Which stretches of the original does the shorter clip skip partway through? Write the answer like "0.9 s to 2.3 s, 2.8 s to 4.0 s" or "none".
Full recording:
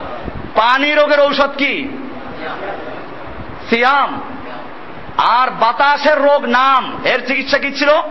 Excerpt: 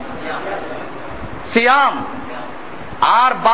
none